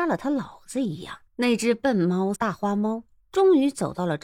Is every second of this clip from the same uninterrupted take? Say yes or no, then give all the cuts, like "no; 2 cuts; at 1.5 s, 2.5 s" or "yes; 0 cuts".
no; 2 cuts; at 1.3 s, 2.3 s